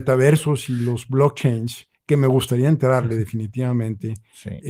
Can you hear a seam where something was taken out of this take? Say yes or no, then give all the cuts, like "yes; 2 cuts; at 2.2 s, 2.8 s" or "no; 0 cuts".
no; 0 cuts